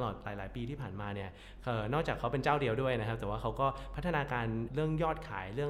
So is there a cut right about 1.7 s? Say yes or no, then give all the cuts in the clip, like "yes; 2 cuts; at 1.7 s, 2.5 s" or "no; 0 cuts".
no; 1 cut; at 4.7 s